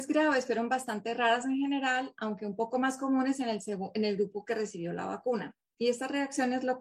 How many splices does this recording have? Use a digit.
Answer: 0